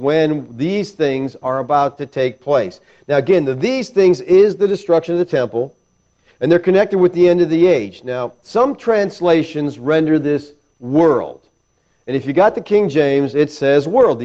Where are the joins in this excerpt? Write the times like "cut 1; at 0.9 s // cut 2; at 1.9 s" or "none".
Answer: none